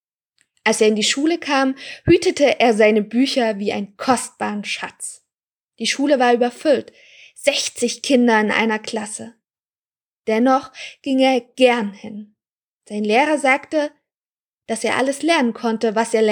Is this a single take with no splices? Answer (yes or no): yes